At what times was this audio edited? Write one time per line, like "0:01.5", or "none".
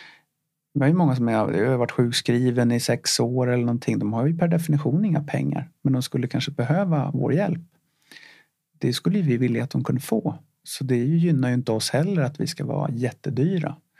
none